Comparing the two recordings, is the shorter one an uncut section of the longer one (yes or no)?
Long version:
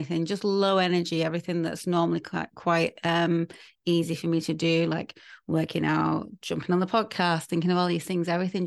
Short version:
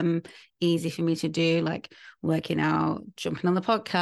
yes